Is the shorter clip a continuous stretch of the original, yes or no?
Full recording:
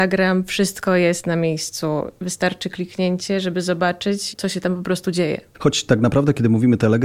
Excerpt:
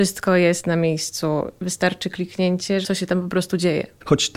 no